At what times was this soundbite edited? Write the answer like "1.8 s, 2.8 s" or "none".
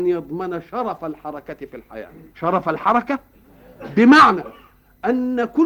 2.3 s